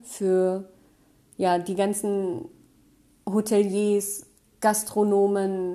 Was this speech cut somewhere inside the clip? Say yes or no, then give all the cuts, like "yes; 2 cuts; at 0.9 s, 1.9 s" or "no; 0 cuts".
no; 0 cuts